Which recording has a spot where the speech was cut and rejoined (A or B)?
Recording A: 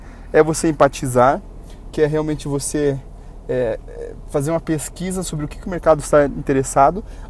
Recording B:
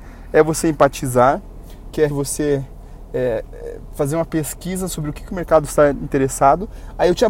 B